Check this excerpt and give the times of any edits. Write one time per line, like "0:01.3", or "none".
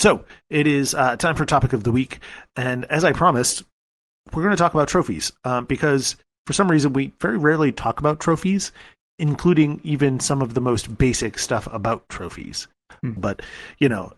0:13.2